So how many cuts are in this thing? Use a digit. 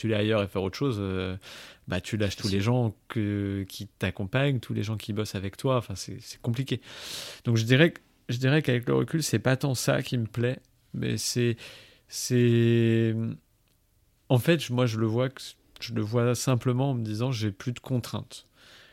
0